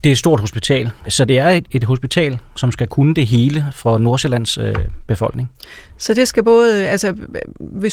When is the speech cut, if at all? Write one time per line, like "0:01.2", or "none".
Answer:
0:01.1

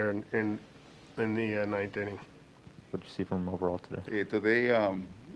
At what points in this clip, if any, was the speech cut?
0:02.9
0:04.1

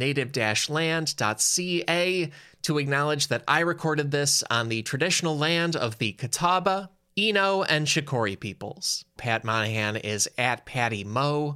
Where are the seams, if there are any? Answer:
0:09.2

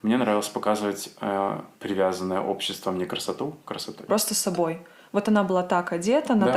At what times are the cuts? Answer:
0:01.7
0:04.1

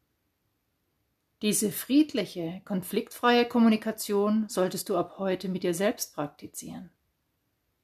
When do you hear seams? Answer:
none

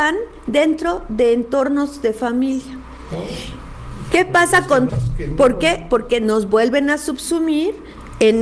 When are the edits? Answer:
0:04.9

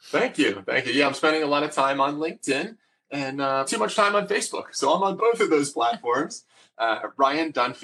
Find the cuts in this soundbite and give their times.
0:03.7
0:05.2

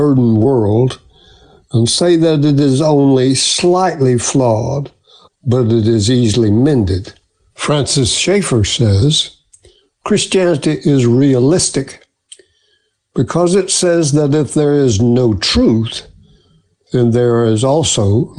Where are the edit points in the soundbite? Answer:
0:05.3
0:07.5

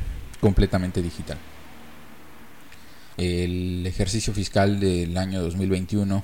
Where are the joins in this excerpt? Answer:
0:03.2

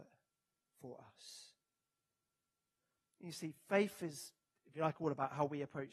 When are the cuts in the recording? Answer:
none

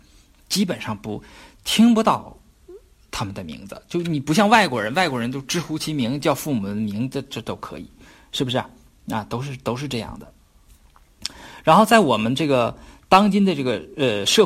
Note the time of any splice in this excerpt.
none

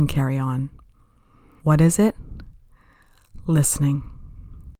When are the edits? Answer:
0:01.6

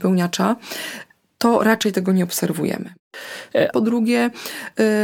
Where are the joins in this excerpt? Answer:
0:03.7

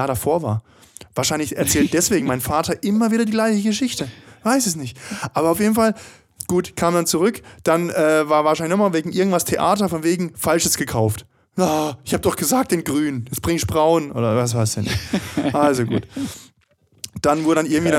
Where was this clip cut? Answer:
none

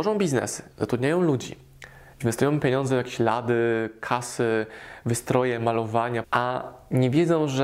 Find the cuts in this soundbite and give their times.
0:06.2

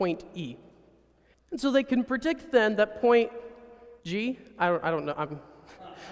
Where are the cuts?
0:01.3
0:04.0

